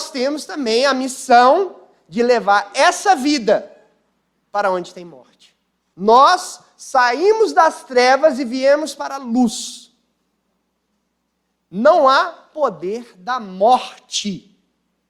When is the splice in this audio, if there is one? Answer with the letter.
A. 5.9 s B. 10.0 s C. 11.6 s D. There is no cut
A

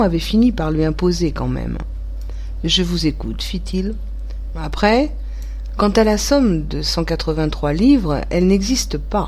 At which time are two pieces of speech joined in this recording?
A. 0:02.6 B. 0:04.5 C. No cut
B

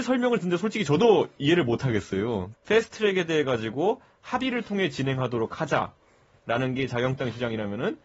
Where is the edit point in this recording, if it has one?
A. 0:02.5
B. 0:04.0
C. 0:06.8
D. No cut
A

